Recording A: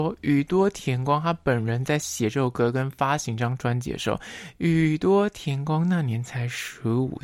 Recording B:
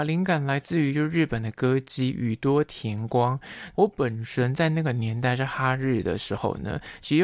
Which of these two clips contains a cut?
B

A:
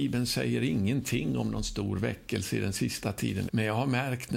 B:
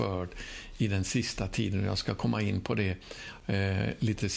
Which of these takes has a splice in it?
A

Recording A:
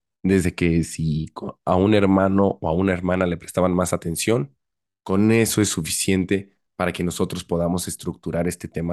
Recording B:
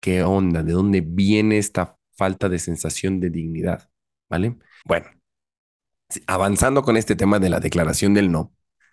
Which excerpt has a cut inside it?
B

